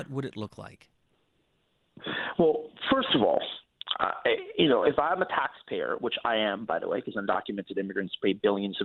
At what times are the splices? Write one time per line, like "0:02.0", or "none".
none